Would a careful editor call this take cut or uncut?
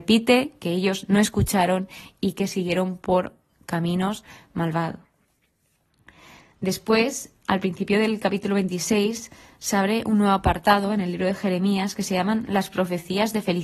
uncut